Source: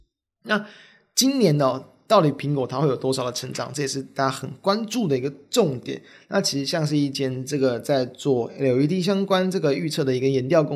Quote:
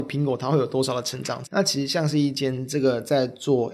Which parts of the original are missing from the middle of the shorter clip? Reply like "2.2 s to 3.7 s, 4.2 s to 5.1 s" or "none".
3.7 s to 6.2 s